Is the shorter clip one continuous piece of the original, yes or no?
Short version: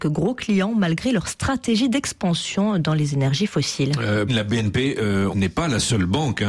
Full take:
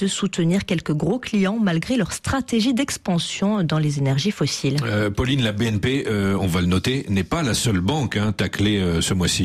no